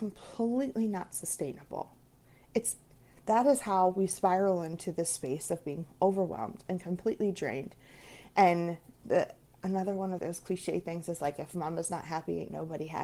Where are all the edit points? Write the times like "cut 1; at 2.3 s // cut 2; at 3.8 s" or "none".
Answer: cut 1; at 10.2 s